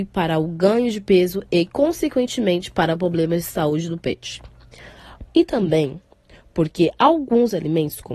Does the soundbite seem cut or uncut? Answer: cut